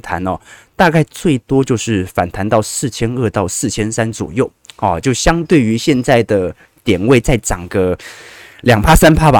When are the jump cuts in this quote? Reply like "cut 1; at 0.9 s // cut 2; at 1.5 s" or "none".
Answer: none